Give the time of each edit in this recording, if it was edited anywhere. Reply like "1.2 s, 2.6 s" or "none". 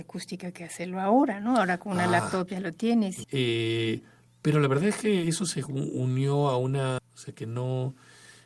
3.2 s, 7.0 s